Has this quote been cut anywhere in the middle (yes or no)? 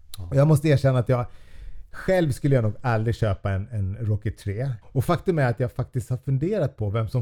yes